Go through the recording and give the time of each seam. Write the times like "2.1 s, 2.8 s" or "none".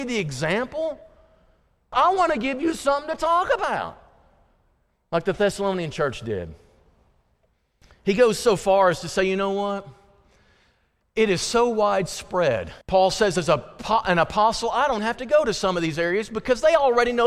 1.9 s, 12.8 s, 15.0 s